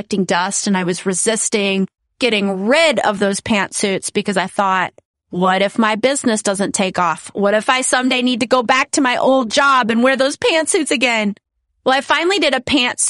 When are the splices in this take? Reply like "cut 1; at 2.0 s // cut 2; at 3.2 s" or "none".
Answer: none